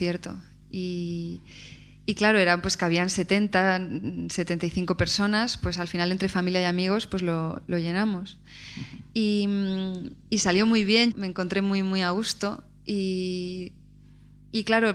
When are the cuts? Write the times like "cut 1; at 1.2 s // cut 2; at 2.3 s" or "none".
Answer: cut 1; at 11.1 s